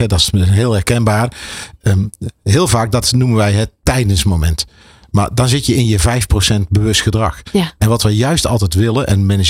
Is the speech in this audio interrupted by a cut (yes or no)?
no